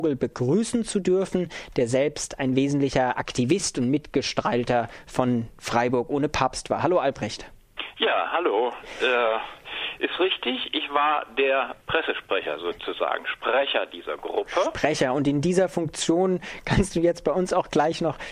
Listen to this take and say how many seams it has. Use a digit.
1